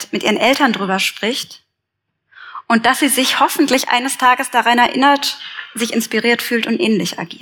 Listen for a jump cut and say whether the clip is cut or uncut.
uncut